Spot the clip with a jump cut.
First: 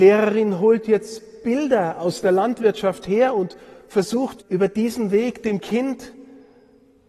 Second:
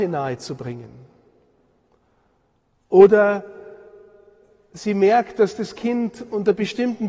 first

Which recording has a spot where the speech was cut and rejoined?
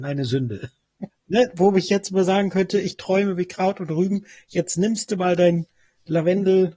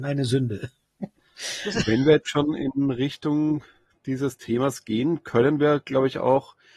first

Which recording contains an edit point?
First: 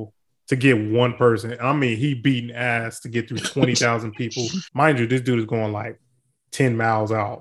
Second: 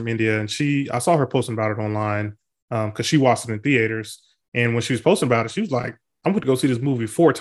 first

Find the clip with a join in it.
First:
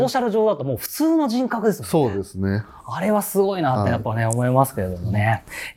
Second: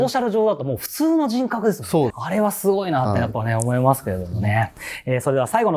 second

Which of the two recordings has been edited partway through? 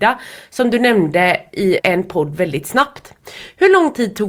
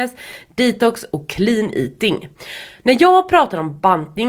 first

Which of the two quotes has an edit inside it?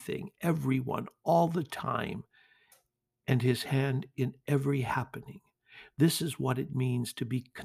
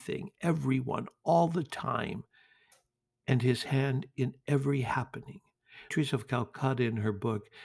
second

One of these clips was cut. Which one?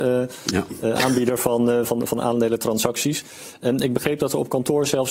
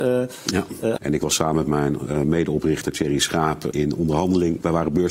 second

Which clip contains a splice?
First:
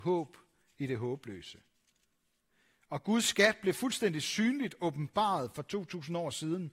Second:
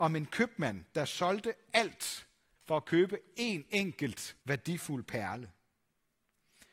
second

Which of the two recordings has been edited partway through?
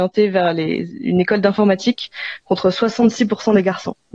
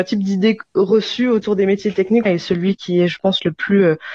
second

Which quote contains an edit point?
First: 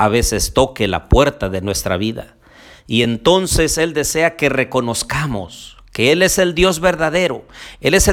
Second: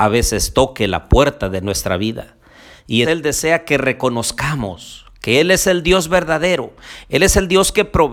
second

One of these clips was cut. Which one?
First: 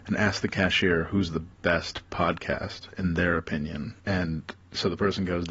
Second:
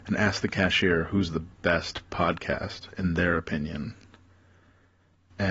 first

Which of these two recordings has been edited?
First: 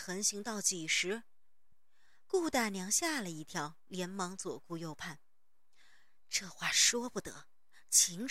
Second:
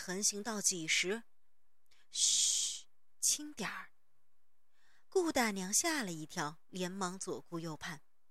first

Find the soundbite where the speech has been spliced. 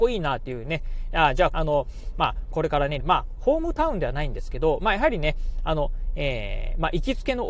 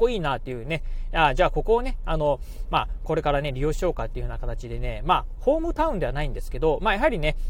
first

